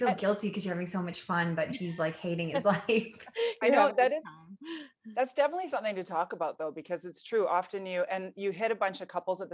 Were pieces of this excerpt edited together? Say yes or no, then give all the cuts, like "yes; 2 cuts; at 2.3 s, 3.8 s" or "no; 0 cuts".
no; 0 cuts